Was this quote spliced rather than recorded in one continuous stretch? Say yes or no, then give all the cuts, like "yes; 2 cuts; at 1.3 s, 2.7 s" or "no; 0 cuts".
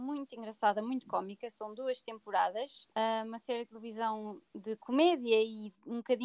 yes; 2 cuts; at 2.9 s, 4.5 s